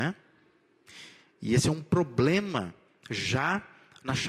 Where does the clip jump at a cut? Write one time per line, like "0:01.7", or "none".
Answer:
none